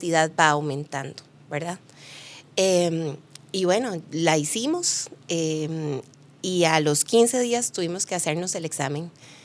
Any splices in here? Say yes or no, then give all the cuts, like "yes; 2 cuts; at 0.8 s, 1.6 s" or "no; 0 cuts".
no; 0 cuts